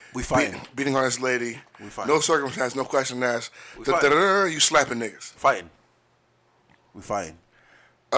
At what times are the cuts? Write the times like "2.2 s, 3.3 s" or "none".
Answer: none